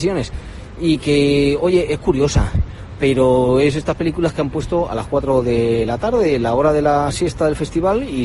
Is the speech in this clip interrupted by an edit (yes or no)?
no